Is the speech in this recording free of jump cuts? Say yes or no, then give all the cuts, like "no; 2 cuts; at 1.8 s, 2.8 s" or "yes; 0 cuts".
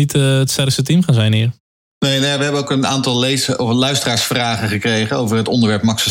yes; 0 cuts